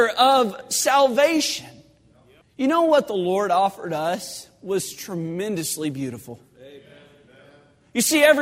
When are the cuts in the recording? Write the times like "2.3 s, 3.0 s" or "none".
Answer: 2.4 s